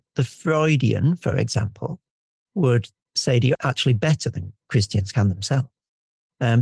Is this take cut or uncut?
cut